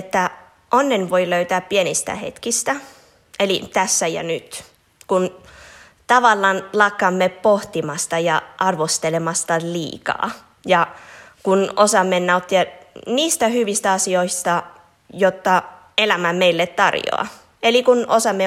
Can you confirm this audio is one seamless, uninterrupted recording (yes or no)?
yes